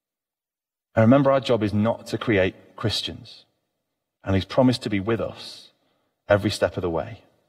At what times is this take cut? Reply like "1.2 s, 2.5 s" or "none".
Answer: 4.2 s